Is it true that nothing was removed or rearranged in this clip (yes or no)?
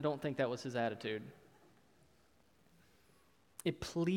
yes